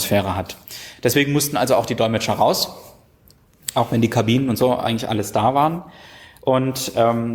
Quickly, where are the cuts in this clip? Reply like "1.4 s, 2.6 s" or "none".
none